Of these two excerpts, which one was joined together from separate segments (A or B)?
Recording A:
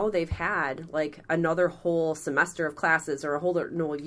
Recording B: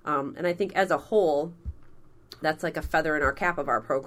B